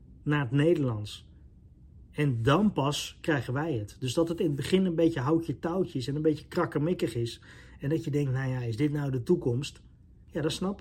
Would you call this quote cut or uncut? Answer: uncut